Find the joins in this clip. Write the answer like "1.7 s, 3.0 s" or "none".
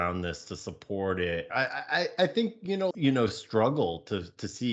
1.5 s, 2.9 s